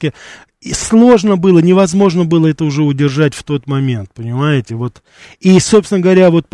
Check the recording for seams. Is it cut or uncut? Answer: uncut